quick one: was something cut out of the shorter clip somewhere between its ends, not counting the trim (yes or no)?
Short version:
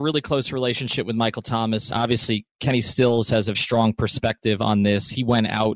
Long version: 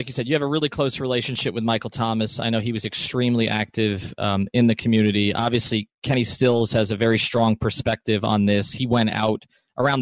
yes